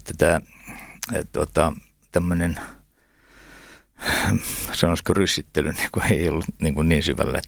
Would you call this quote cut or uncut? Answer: uncut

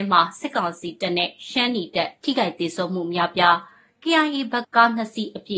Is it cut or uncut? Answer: cut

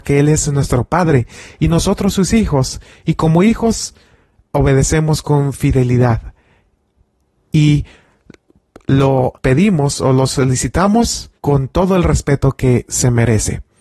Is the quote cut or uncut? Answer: cut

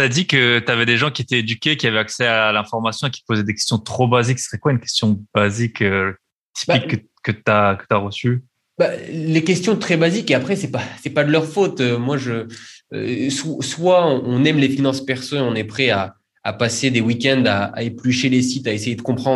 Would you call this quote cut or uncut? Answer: uncut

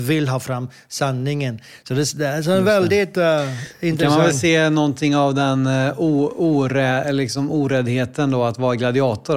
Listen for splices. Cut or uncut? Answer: uncut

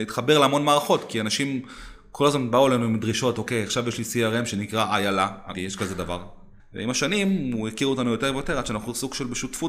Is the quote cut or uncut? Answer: cut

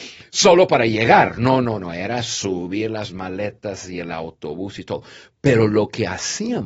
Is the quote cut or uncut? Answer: uncut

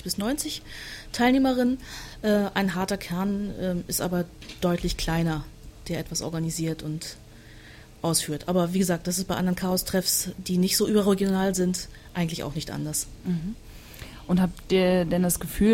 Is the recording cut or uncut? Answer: uncut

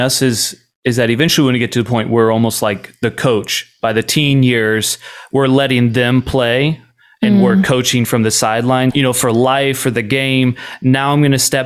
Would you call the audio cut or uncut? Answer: cut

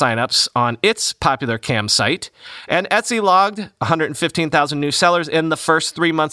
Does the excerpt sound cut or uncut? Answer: uncut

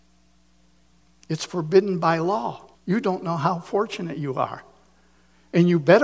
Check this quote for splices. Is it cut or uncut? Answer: cut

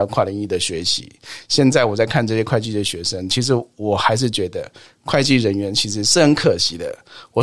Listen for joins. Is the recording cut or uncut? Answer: uncut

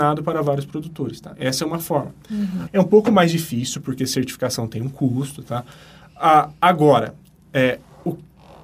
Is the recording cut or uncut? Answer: cut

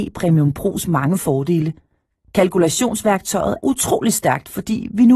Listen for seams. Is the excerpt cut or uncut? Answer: cut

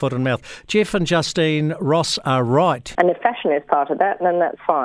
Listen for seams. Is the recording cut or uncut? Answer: cut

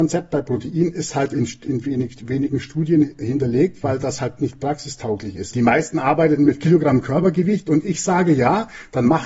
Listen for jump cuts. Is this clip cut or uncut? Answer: cut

